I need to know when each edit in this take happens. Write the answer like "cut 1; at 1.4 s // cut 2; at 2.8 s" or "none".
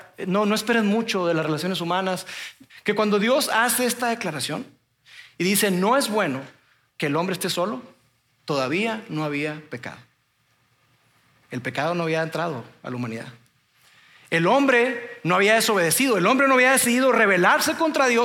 cut 1; at 2.7 s